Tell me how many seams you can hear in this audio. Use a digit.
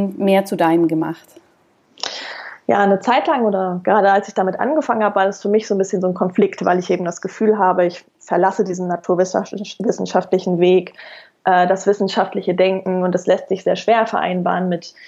0